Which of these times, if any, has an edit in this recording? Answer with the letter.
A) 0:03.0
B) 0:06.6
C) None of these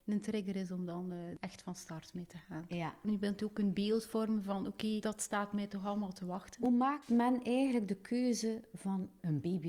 A